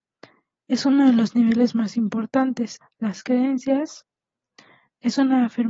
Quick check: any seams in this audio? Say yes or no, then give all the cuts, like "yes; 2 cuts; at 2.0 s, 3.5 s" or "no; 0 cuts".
yes; 1 cut; at 2.8 s